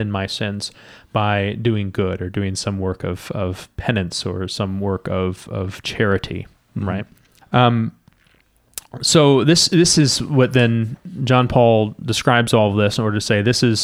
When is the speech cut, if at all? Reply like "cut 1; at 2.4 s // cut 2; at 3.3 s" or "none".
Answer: cut 1; at 7.4 s